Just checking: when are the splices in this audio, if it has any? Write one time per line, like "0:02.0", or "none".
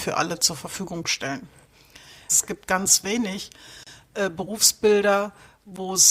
0:02.3